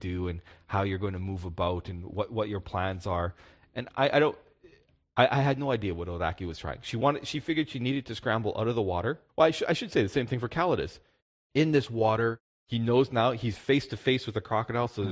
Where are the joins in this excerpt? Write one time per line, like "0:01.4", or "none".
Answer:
0:09.3

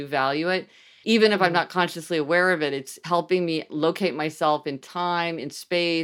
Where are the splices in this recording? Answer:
0:01.0

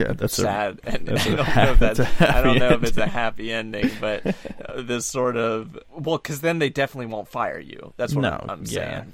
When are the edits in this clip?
none

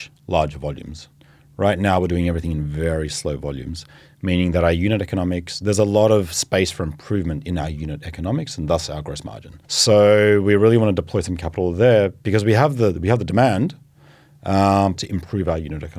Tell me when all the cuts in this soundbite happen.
0:09.6
0:14.9

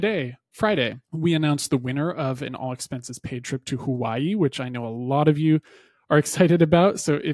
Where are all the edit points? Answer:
0:01.0

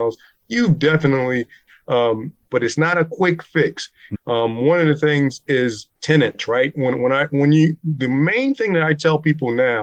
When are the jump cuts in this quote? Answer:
0:02.5
0:04.1
0:05.9

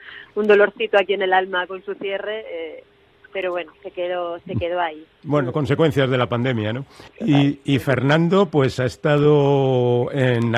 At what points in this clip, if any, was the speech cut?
none

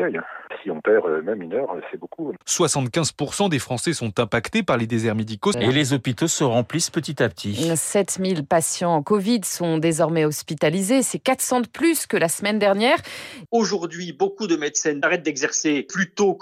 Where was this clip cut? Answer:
0:02.4
0:05.5
0:13.5

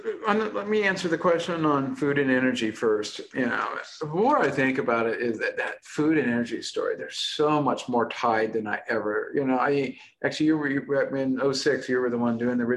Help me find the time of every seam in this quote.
none

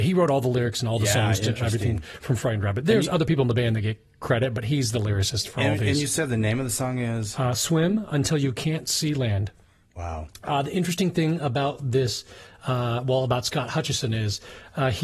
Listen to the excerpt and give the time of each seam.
none

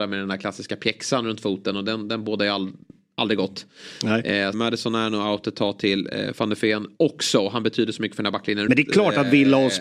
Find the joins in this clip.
0:04.5
0:08.7

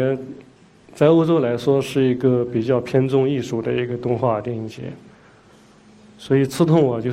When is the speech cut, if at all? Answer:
none

